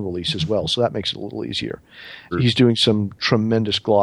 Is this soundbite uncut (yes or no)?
no